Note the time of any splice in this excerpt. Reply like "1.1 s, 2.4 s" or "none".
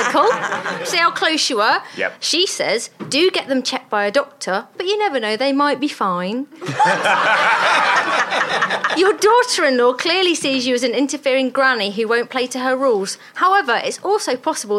none